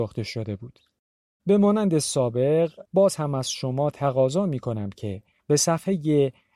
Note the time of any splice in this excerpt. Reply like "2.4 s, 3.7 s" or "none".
1.4 s, 2.8 s